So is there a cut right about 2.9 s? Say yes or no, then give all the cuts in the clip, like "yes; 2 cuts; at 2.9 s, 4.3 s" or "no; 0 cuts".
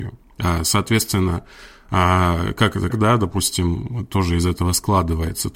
yes; 1 cut; at 2.9 s